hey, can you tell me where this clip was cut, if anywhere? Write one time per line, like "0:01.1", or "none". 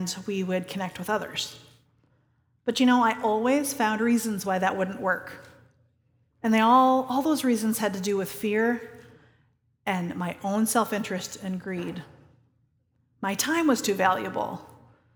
none